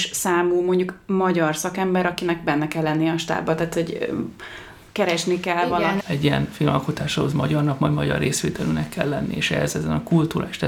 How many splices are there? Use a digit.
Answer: 1